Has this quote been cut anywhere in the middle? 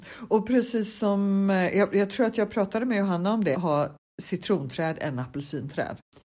yes; 1 cut; at 3.5 s

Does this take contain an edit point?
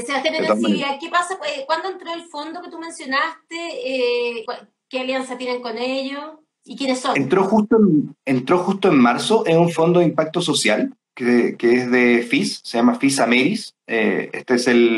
yes; 1 cut; at 4.5 s

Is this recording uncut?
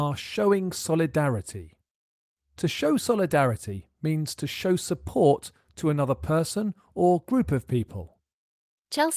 yes; 0 cuts

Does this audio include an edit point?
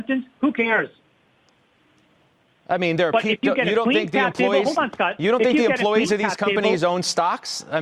no; 0 cuts

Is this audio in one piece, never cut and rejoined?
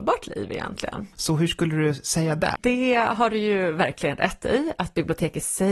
no; 2 cuts; at 1.1 s, 2.6 s

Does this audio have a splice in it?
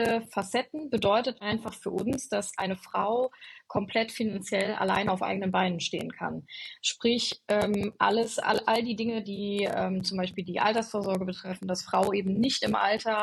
no; 0 cuts

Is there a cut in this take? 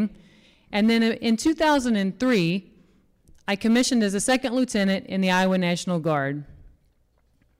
no; 0 cuts

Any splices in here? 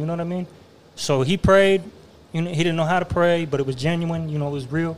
no; 0 cuts

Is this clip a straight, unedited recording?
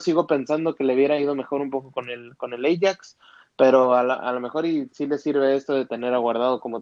yes; 0 cuts

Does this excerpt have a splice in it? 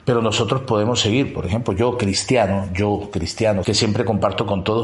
yes; 1 cut; at 3.6 s

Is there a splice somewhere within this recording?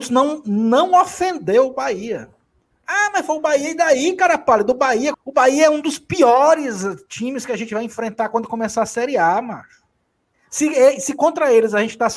yes; 2 cuts; at 5.1 s, 10.3 s

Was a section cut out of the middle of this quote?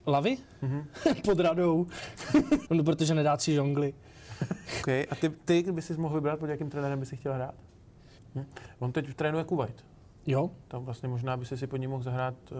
yes; 3 cuts; at 2.7 s, 4.8 s, 8.2 s

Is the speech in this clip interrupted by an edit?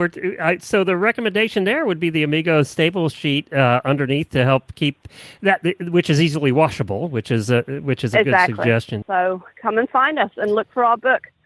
yes; 1 cut; at 9.0 s

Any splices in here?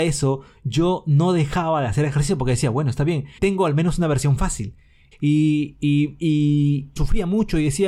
yes; 3 cuts; at 3.4 s, 5.1 s, 7.0 s

